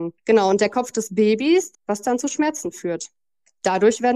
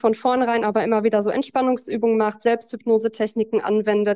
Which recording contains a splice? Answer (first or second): first